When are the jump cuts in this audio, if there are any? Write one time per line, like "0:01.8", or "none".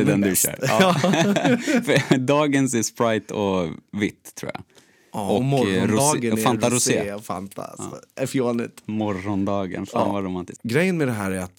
none